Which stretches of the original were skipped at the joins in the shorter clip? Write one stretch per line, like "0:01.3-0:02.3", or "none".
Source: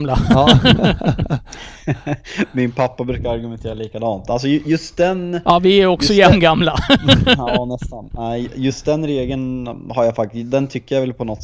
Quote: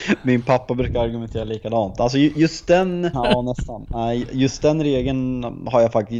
0:05.4-0:07.4